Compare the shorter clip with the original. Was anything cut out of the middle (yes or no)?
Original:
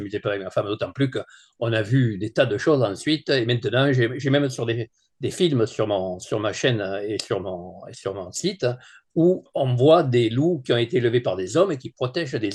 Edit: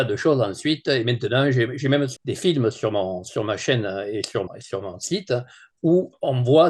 yes